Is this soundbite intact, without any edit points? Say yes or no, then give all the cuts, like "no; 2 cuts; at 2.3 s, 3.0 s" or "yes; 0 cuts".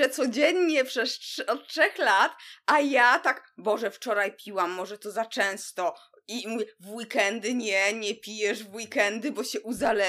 yes; 0 cuts